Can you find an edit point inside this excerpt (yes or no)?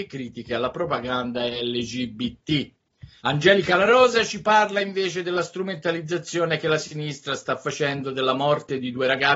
yes